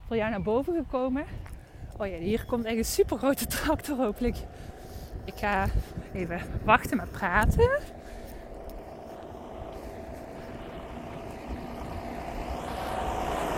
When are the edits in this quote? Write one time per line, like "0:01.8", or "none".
none